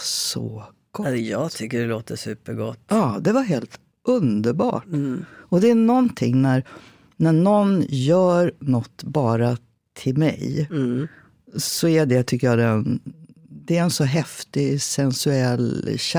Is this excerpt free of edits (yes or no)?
yes